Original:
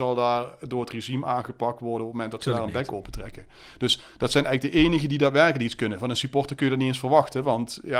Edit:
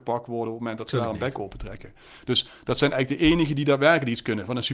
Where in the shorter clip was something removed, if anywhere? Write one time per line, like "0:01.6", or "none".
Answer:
none